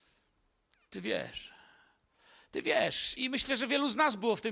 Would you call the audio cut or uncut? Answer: cut